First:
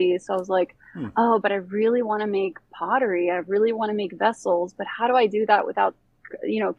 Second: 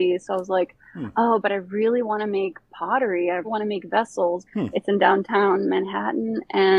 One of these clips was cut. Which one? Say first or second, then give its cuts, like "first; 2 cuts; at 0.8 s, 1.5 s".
second; 2 cuts; at 3.4 s, 4.5 s